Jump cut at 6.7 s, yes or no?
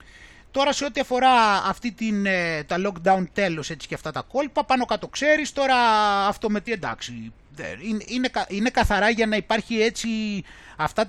yes